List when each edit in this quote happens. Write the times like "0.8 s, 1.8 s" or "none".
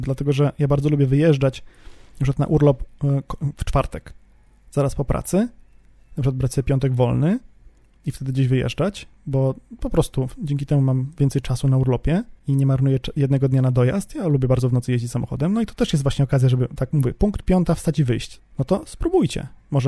18.4 s